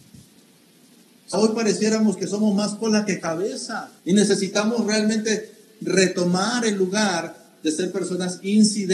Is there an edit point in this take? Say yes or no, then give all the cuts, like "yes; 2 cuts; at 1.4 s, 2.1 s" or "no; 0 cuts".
yes; 2 cuts; at 1.3 s, 4.0 s